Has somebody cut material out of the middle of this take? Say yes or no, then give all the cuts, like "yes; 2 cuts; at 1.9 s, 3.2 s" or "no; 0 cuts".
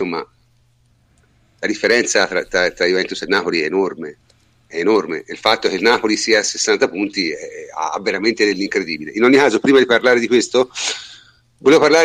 no; 0 cuts